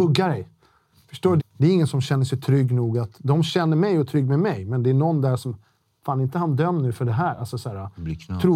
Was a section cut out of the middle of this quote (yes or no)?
yes